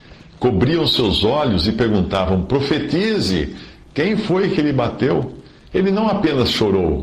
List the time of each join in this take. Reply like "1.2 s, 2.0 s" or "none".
5.7 s